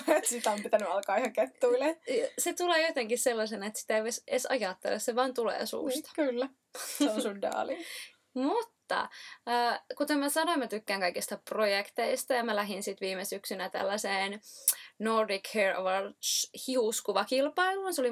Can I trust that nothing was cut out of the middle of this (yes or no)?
yes